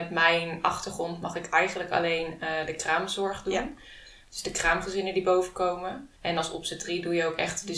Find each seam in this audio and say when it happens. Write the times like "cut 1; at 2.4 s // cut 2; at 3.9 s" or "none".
cut 1; at 6.2 s